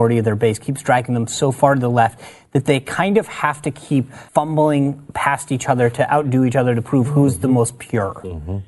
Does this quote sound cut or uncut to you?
cut